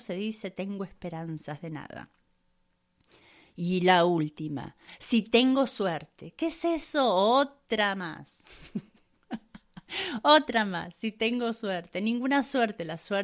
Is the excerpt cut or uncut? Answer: uncut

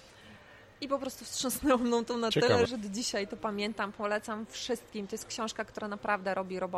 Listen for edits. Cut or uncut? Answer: cut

